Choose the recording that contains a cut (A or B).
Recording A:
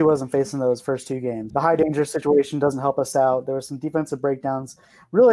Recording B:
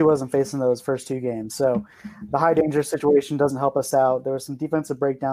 A